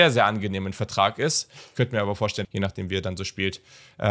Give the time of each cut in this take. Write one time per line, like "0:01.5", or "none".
0:02.4